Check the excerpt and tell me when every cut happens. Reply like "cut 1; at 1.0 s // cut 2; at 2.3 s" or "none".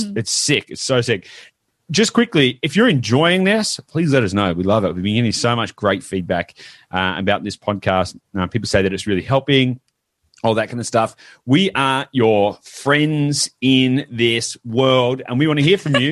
none